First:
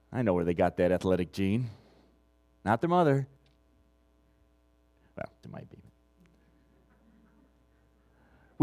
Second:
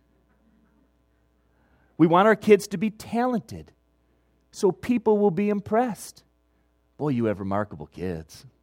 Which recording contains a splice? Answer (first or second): first